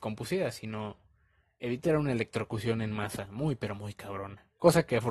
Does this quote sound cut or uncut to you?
uncut